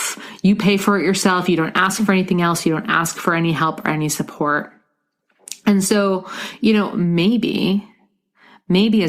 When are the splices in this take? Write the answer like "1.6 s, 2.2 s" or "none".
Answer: none